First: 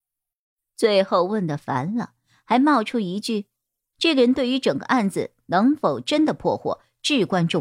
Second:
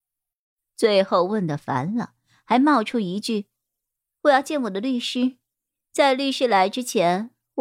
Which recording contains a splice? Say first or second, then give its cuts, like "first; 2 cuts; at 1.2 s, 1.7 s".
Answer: first; 1 cut; at 3.9 s